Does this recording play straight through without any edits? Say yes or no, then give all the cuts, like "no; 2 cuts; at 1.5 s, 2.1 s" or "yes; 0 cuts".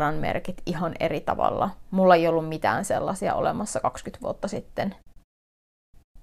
yes; 0 cuts